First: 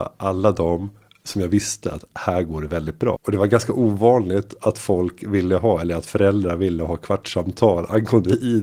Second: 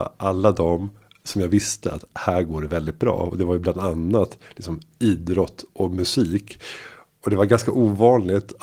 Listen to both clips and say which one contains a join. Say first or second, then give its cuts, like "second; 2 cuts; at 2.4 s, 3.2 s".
first; 1 cut; at 3.2 s